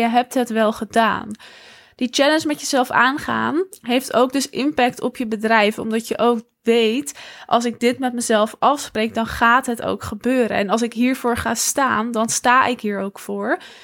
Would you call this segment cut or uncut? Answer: uncut